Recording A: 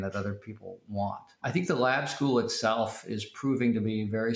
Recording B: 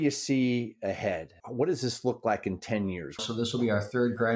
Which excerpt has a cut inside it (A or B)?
B